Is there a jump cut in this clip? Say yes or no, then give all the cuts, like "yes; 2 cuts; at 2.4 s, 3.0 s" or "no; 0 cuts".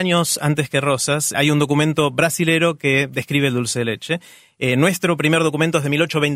yes; 1 cut; at 1.3 s